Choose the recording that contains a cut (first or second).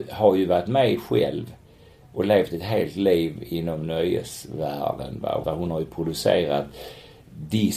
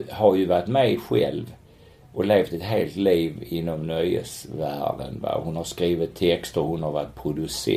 first